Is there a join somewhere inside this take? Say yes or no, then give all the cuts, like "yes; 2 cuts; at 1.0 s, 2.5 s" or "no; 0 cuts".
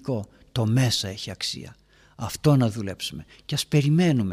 no; 0 cuts